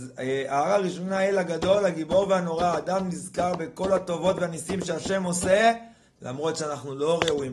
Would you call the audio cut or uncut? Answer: uncut